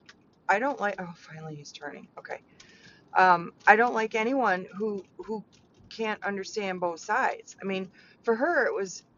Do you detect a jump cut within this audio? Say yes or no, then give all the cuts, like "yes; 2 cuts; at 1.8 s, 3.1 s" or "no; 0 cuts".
no; 0 cuts